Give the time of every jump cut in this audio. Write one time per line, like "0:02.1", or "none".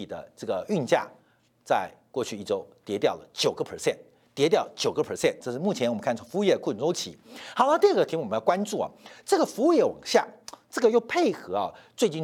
0:05.4